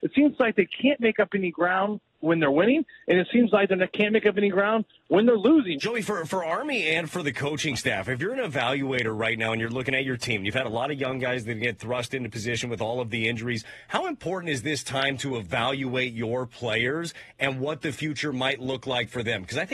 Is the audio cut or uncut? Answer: cut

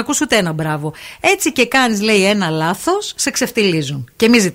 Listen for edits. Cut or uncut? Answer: uncut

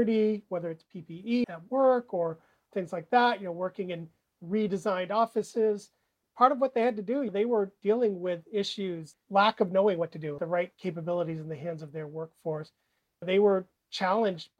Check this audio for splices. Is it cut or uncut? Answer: cut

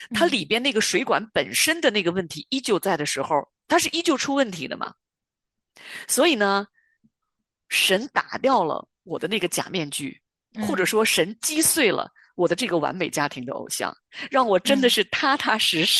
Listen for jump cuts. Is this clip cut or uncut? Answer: uncut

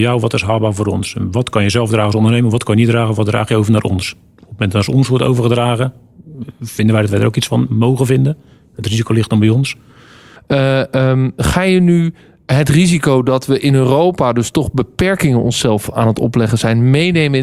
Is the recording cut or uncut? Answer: cut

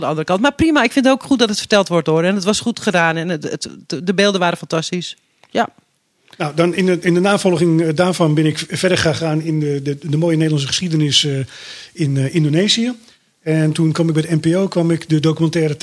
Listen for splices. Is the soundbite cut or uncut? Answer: uncut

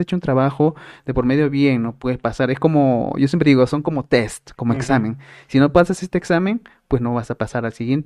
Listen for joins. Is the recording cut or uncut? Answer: uncut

